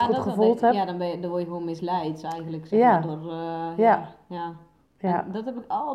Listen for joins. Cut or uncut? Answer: cut